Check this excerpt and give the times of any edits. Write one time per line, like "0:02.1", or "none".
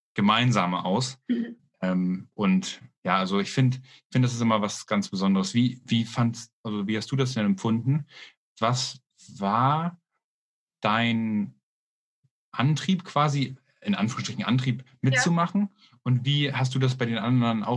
none